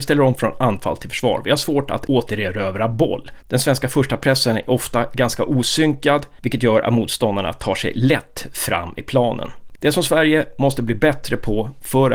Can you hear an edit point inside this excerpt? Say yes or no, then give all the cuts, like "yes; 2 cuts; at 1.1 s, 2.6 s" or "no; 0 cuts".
yes; 1 cut; at 9.7 s